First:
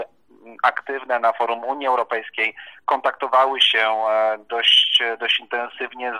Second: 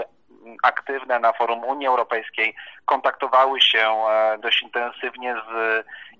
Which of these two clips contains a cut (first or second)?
second